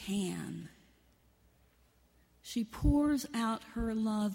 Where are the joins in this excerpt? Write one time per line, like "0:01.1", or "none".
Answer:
none